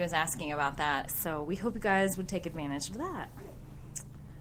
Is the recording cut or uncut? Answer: cut